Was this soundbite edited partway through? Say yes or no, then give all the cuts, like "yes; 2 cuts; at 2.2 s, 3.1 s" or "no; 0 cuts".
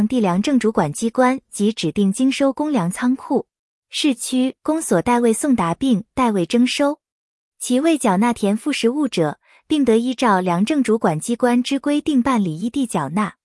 yes; 1 cut; at 3.8 s